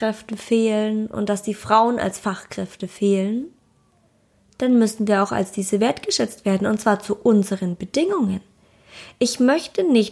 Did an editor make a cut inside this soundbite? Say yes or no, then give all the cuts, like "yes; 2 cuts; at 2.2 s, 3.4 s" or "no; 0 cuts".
no; 0 cuts